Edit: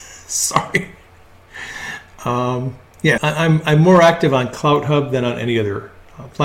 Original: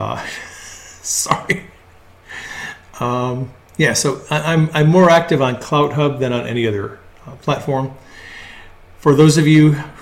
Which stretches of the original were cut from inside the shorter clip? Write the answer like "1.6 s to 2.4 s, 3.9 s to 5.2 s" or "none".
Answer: 3.9 s to 4.3 s